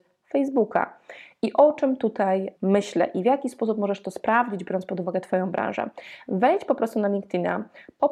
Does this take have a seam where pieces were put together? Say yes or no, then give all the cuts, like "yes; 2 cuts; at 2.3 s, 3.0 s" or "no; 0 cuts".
yes; 1 cut; at 2.6 s